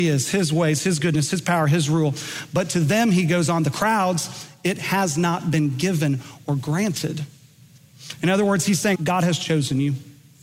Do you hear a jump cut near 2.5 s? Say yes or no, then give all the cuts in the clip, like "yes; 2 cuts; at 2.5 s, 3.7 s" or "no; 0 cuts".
no; 1 cut; at 8.9 s